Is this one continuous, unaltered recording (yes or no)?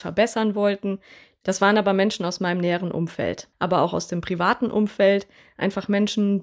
no